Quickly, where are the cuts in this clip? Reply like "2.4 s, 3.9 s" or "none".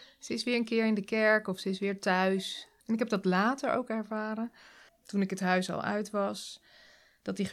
2.8 s, 4.9 s